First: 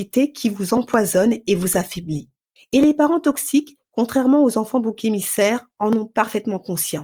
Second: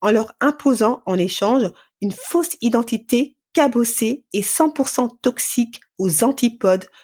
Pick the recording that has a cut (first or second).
first